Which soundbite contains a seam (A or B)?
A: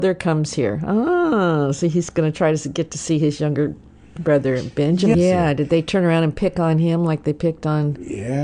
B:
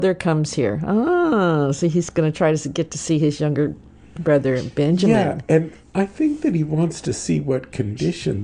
A